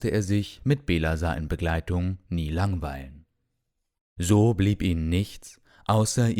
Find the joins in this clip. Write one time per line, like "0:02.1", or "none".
0:04.0